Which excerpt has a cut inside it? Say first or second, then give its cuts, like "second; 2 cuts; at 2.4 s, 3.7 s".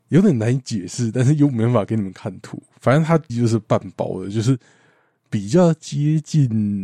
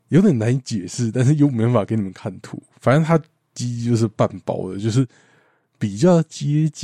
first; 1 cut; at 3.3 s